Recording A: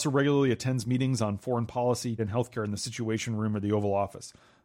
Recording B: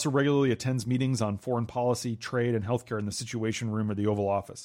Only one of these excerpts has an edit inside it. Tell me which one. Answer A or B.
A